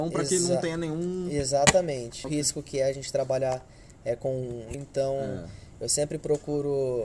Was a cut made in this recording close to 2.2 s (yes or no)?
yes